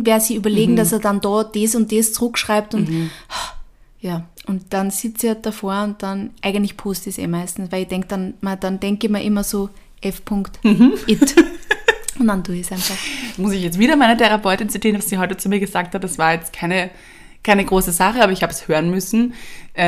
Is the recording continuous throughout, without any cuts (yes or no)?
yes